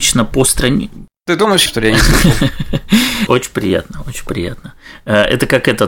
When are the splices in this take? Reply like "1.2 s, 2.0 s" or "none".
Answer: 1.7 s, 3.3 s